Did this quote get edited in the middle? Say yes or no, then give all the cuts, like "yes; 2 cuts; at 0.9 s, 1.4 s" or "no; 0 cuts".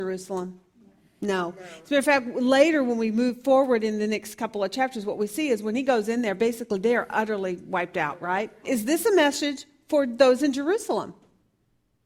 yes; 1 cut; at 8.6 s